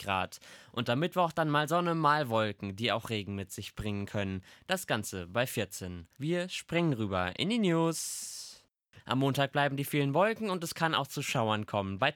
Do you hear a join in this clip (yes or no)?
yes